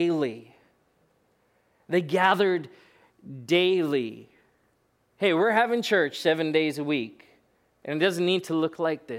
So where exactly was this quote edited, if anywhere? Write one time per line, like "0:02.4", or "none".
0:05.0